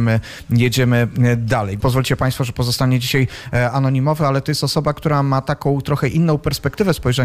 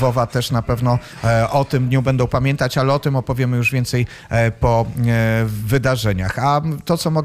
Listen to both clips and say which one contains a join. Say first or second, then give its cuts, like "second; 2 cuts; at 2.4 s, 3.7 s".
first; 1 cut; at 1.8 s